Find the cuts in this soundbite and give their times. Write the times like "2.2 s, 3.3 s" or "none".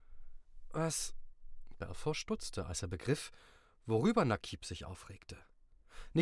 none